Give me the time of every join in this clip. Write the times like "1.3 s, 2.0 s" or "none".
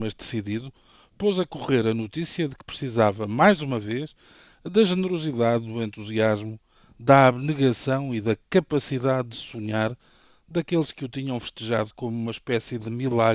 none